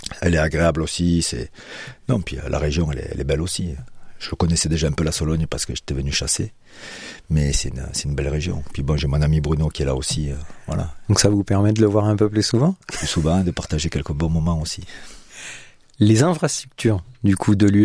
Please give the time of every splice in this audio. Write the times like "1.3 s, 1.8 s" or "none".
none